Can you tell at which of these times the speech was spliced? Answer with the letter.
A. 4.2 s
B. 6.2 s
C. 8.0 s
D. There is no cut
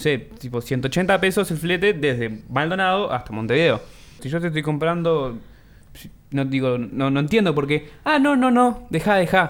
A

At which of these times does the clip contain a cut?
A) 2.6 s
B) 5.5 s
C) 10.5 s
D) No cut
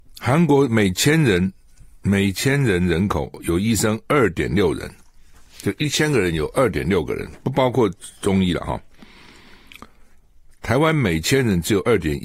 C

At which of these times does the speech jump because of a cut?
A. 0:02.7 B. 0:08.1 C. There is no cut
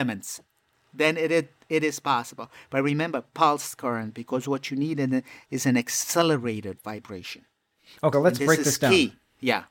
B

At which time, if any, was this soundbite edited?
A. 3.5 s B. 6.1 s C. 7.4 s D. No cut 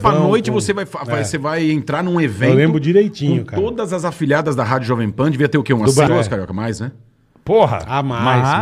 B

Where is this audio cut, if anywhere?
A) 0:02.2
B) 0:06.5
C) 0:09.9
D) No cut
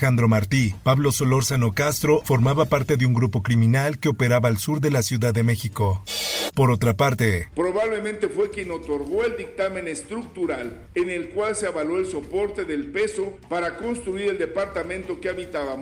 A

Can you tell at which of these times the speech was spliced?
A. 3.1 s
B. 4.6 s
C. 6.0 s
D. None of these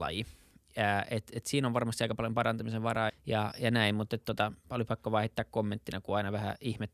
A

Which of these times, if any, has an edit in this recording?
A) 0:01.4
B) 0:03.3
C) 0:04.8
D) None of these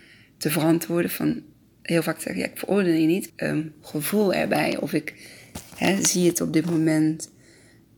B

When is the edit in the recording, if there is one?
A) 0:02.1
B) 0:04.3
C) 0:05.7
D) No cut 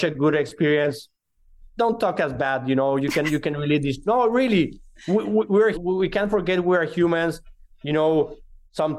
C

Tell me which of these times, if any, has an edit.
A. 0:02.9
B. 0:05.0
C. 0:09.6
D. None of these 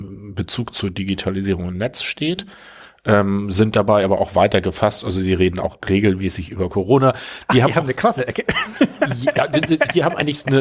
D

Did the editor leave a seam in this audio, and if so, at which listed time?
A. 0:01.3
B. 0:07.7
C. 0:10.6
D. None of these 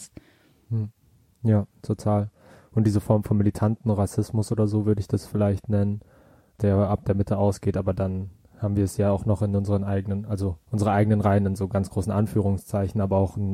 C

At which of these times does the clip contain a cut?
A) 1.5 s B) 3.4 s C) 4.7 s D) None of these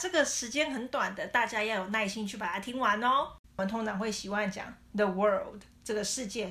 B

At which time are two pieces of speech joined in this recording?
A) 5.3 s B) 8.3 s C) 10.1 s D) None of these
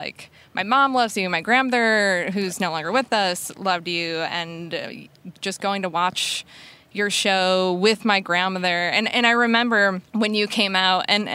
C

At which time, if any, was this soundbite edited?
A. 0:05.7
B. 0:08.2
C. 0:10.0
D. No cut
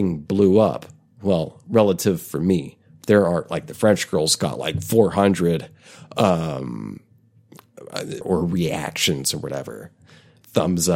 B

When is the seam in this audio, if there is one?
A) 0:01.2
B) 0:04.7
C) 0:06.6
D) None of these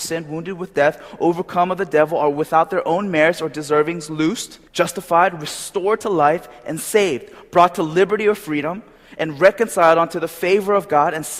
B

